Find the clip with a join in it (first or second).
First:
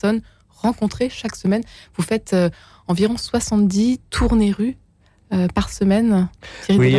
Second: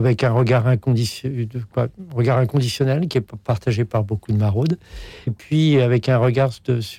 second